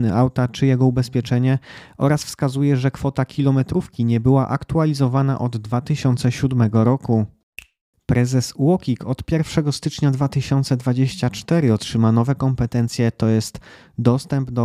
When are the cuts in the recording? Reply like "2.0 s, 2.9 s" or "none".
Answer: none